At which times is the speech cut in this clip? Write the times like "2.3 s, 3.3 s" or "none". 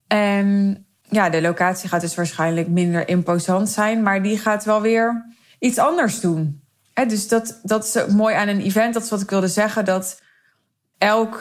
none